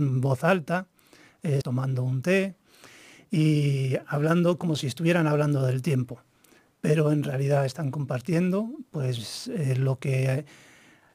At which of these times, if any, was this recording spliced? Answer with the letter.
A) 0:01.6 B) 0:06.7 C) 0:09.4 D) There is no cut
A